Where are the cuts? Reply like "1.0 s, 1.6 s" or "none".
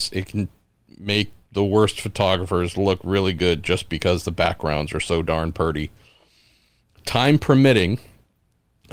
none